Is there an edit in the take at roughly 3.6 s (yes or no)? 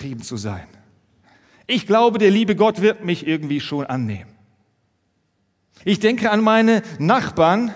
no